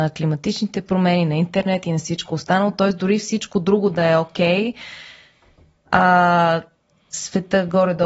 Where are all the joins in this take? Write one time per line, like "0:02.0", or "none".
none